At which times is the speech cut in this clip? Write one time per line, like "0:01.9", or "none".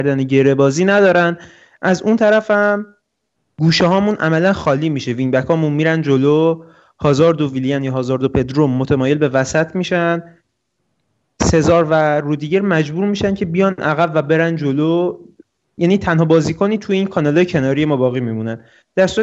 none